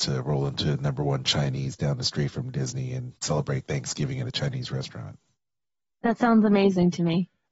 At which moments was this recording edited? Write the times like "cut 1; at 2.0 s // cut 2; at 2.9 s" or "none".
cut 1; at 3.2 s